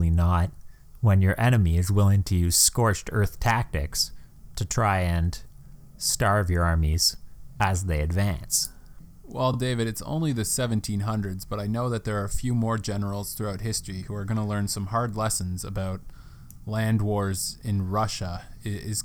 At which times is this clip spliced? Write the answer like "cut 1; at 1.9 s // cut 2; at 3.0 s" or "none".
none